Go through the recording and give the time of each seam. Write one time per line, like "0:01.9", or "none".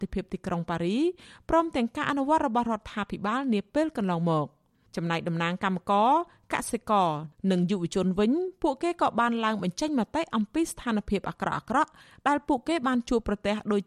none